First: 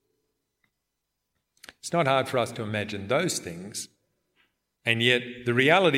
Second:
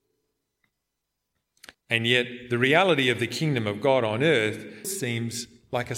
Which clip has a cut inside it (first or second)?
second